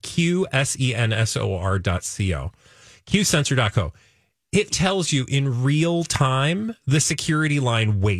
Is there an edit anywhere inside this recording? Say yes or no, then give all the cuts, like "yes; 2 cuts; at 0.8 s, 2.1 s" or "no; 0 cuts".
yes; 1 cut; at 4.7 s